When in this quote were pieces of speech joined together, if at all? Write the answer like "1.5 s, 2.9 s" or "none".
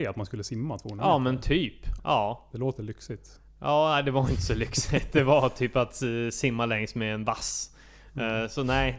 2.0 s